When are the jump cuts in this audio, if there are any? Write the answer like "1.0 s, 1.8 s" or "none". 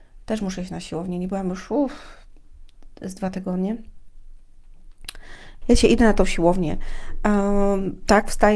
5.6 s